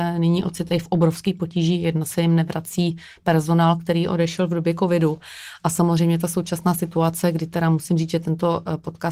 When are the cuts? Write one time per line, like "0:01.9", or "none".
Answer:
none